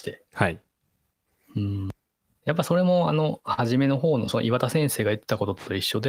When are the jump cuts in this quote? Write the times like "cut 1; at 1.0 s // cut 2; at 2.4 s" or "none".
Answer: none

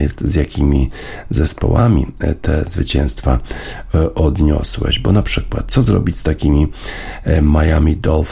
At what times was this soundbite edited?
none

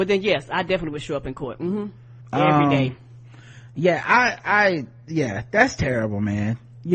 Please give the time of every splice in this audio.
cut 1; at 2.2 s

